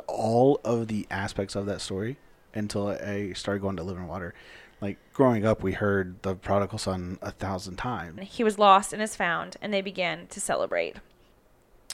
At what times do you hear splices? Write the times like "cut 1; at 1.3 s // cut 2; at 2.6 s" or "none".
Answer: cut 1; at 8.2 s

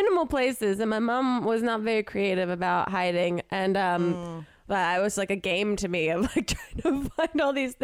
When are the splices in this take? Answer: cut 1; at 4.7 s

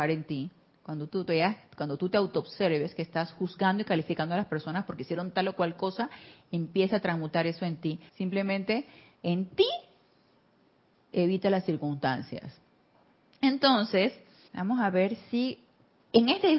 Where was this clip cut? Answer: cut 1; at 8.1 s // cut 2; at 14.5 s

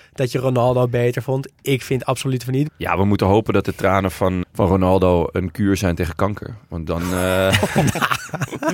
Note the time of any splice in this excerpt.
cut 1; at 2.7 s // cut 2; at 4.4 s

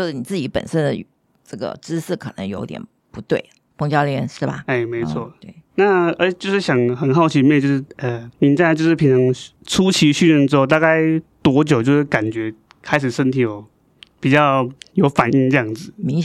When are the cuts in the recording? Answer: cut 1; at 8.3 s // cut 2; at 9.6 s

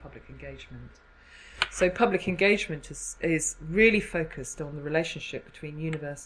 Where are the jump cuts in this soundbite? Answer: none

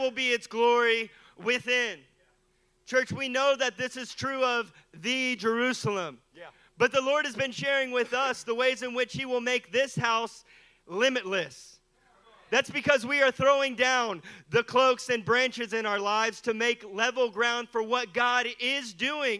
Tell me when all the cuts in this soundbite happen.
none

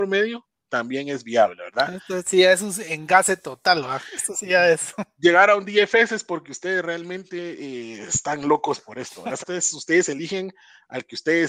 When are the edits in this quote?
cut 1; at 9.4 s

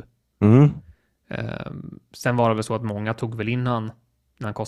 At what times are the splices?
none

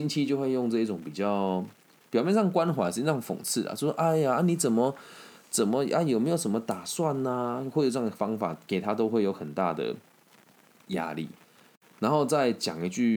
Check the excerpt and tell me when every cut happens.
none

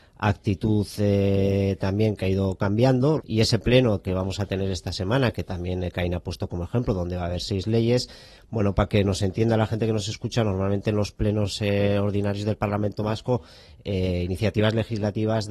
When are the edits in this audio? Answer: cut 1; at 3.2 s

